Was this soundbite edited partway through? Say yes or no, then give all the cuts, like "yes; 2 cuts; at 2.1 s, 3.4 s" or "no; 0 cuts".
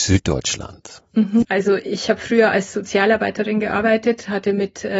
yes; 1 cut; at 1.4 s